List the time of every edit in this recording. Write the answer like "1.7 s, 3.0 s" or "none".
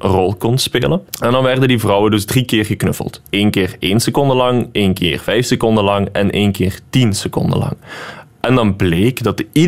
1.1 s